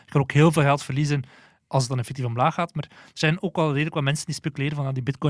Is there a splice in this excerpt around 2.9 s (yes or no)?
no